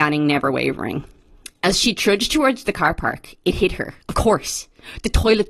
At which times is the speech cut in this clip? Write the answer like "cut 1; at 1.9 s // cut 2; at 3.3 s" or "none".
cut 1; at 4.0 s